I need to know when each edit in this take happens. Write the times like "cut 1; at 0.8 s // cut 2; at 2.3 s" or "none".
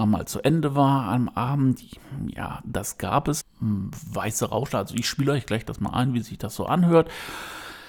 cut 1; at 3.4 s